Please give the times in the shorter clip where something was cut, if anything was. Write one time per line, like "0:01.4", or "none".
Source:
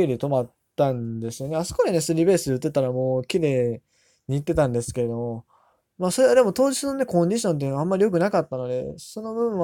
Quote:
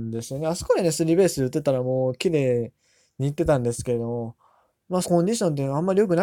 0:05.0